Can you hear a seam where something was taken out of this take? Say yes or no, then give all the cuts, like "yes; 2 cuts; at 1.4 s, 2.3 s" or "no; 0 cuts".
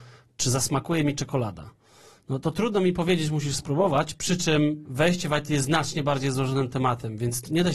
no; 0 cuts